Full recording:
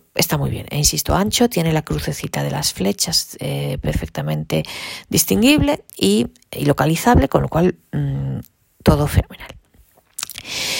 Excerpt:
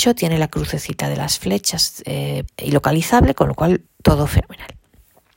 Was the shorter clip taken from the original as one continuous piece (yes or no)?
no